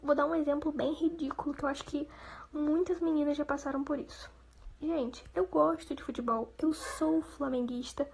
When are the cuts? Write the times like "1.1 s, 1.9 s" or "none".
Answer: none